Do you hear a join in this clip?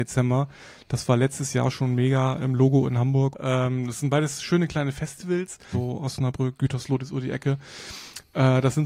yes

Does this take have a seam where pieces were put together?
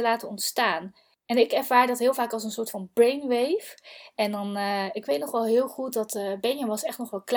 no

